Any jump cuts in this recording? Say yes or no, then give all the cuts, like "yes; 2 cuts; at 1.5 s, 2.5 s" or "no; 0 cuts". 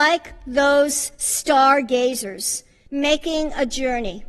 yes; 1 cut; at 2.9 s